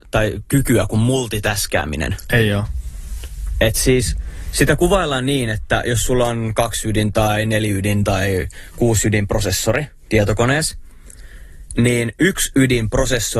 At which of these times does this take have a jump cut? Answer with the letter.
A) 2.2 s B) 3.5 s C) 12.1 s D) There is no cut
D